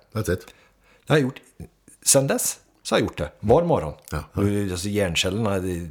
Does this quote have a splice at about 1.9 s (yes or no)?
no